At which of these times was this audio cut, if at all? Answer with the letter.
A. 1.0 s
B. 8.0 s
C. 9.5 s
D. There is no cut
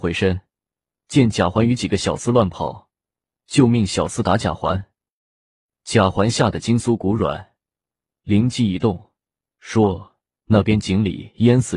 D